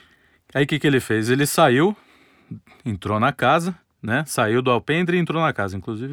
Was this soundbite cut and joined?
no; 0 cuts

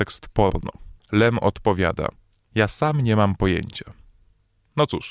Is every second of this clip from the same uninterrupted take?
no; 2 cuts; at 1.0 s, 2.5 s

